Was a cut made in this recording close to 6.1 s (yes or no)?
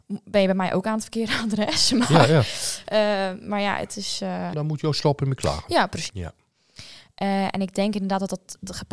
yes